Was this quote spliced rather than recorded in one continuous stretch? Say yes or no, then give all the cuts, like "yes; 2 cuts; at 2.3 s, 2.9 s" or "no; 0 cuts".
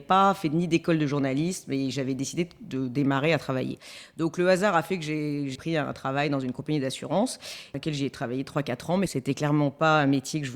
no; 0 cuts